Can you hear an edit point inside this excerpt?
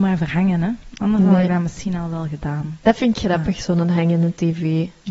no; 0 cuts

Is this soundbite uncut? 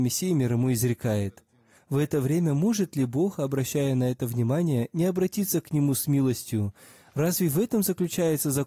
no; 1 cut; at 1.8 s

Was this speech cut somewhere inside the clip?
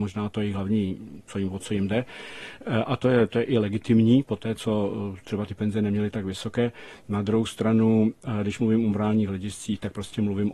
no; 0 cuts

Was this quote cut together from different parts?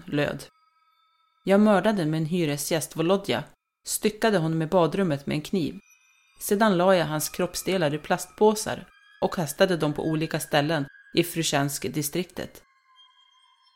no; 0 cuts

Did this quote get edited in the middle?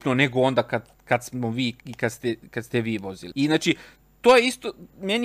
yes; 2 cuts; at 1.8 s, 3.3 s

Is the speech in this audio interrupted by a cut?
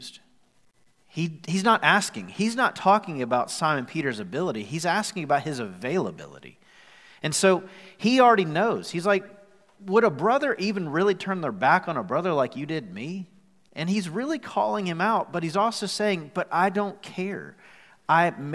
no; 0 cuts

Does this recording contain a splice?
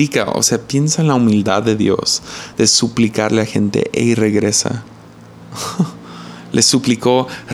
no; 0 cuts

